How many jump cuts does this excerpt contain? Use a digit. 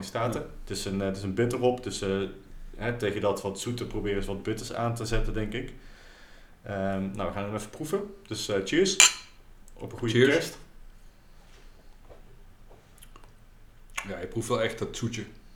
0